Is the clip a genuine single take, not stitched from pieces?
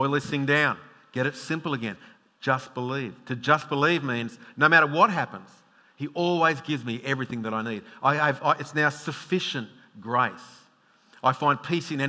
yes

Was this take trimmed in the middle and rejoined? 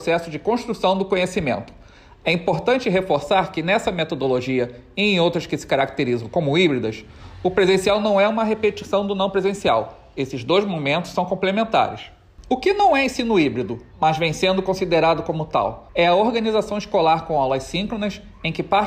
no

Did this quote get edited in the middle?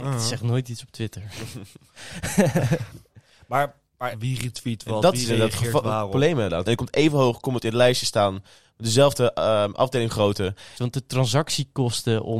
yes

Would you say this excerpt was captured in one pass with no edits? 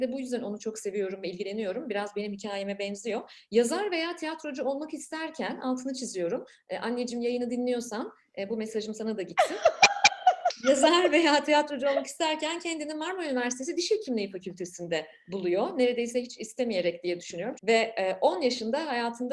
no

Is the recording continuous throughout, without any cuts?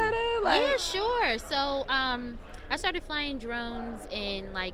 yes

